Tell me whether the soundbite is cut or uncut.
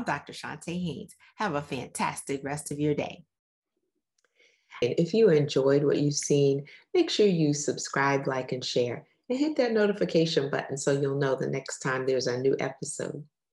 cut